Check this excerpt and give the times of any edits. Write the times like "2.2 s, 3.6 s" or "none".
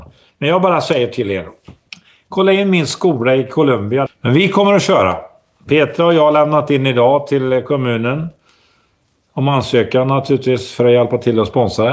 4.1 s